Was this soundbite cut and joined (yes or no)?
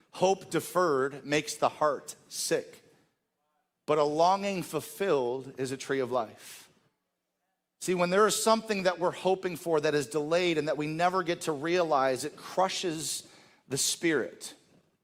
no